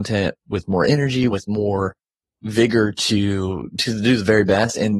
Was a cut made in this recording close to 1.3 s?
yes; 1 cut; at 1.3 s

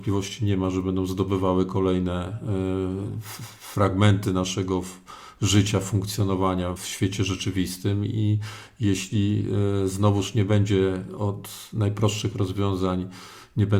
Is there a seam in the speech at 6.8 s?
yes; 1 cut; at 6.8 s

